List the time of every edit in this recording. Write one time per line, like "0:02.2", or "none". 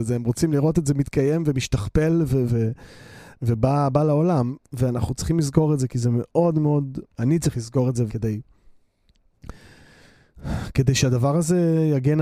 0:02.5
0:08.1

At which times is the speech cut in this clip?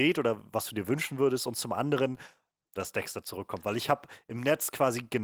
0:02.8

